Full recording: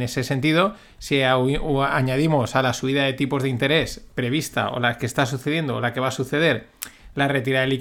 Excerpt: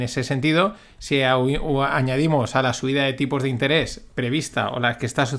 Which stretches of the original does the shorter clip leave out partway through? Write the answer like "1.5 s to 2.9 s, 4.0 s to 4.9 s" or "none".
none